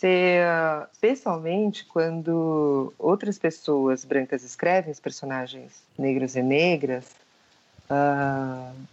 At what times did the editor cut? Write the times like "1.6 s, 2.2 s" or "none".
0.9 s, 5.9 s

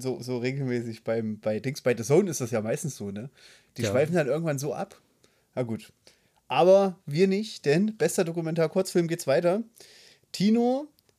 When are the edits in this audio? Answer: none

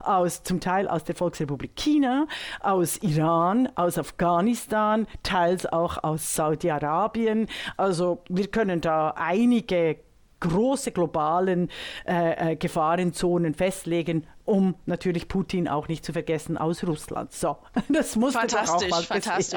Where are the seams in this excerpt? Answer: none

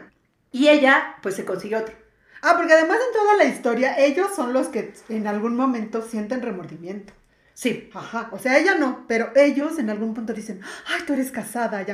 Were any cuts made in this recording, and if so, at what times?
none

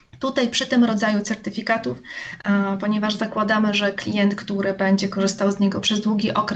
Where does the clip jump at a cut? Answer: none

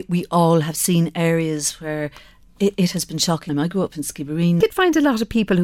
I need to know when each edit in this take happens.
3.5 s, 4.6 s

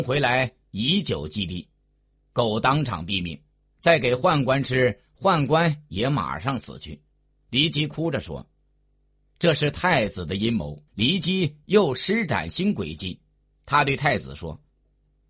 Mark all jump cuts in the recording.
2.3 s, 10.9 s

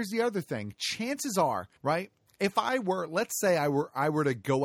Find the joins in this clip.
1.8 s

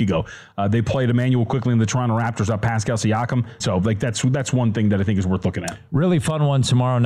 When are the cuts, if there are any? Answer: 3.6 s

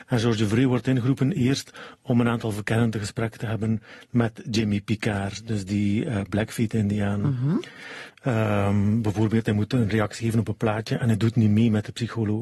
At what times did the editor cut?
8.1 s

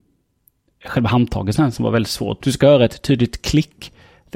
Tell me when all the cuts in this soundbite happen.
2.4 s

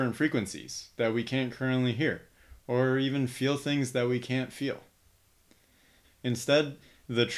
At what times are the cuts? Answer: 2.6 s, 6.0 s

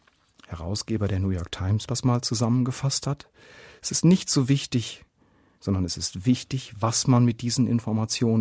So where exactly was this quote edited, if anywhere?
1.9 s, 5.6 s

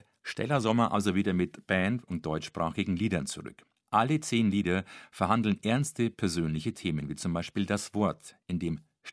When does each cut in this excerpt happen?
3.8 s

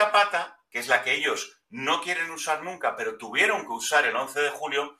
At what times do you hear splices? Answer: none

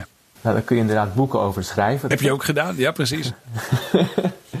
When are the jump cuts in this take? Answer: 2.1 s

